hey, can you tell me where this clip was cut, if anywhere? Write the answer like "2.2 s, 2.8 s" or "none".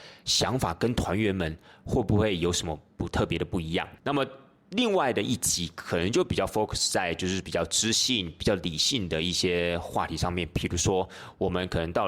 4.0 s